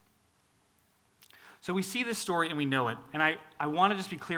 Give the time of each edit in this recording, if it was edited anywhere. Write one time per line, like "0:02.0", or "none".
none